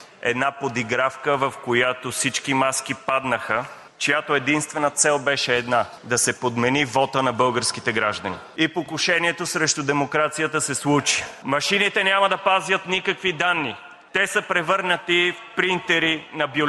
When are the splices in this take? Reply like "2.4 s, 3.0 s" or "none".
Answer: none

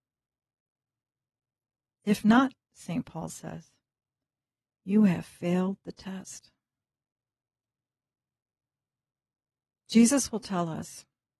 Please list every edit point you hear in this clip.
none

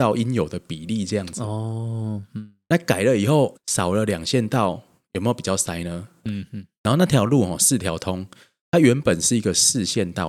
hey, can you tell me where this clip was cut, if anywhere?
3.5 s, 6.2 s

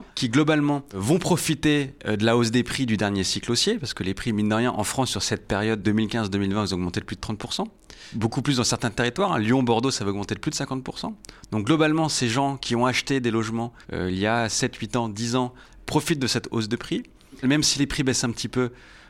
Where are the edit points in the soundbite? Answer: 5.8 s, 13.8 s, 17.4 s

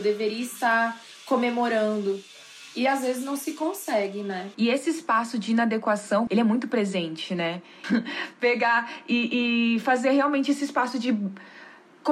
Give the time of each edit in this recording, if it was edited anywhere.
4.5 s, 6.3 s, 7.8 s

